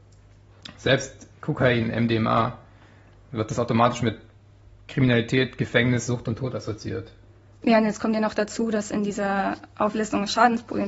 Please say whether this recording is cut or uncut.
uncut